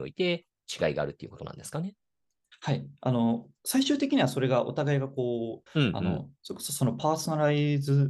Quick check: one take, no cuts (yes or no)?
no